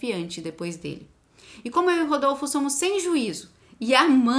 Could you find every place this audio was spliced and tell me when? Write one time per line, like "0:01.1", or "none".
none